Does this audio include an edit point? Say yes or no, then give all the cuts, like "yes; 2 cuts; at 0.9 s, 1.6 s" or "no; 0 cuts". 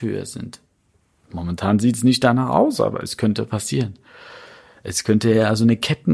no; 0 cuts